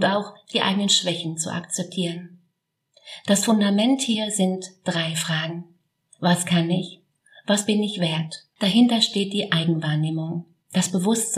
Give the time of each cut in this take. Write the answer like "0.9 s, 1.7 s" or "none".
6.1 s, 8.5 s